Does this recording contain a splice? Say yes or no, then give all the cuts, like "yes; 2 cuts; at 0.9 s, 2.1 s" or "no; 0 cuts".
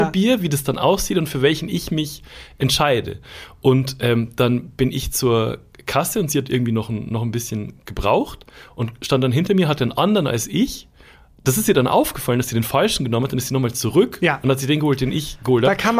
no; 0 cuts